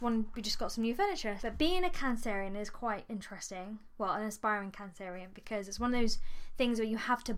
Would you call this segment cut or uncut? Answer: cut